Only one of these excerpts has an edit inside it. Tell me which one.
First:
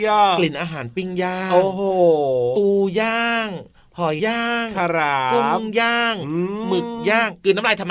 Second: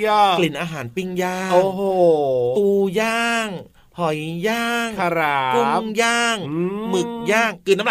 first; 1 cut; at 4.2 s

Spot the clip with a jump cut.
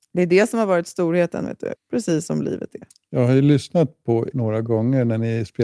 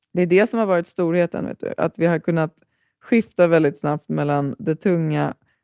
first; 2 cuts; at 1.7 s, 4.3 s

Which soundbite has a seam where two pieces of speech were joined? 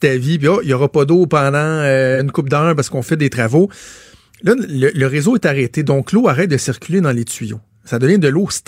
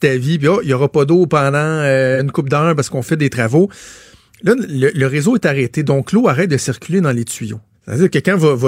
second; 1 cut; at 7.7 s

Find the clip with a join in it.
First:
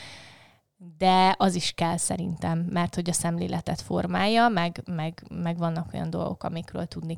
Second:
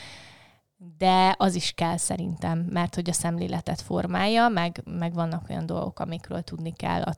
second; 1 cut; at 4.8 s

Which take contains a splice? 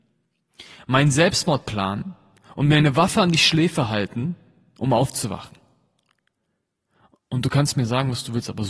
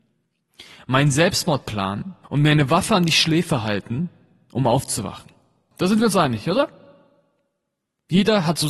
second; 2 cuts; at 2.2 s, 5.7 s

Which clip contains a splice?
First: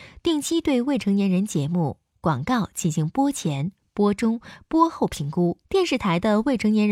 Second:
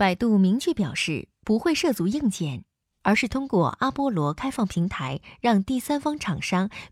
first; 1 cut; at 5.6 s

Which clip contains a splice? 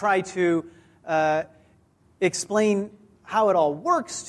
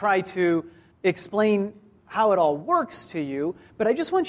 second; 1 cut; at 0.9 s

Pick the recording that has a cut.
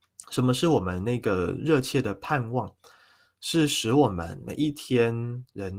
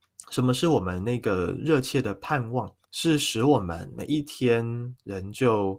second; 1 cut; at 2.8 s

